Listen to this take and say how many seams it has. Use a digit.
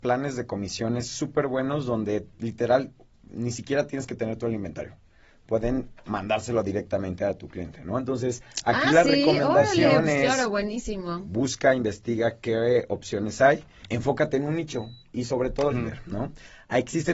2